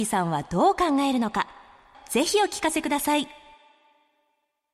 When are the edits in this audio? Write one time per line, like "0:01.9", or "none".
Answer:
0:01.9